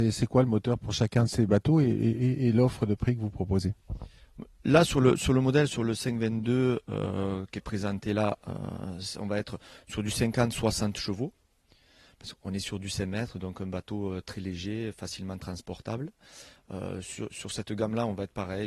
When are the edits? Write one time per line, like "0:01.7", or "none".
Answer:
none